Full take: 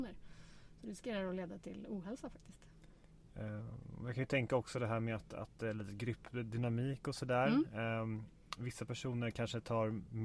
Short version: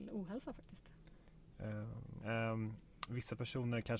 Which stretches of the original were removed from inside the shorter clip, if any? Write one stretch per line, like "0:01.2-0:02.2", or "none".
0:04.0-0:07.7